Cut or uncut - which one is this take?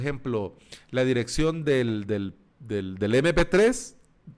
uncut